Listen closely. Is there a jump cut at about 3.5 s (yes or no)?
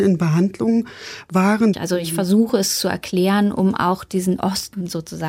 no